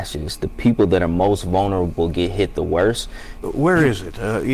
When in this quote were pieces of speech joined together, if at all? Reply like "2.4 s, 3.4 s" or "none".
3.4 s